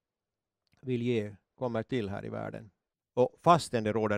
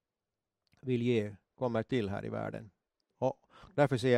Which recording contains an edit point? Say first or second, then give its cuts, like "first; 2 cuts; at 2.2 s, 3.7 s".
first; 1 cut; at 2.9 s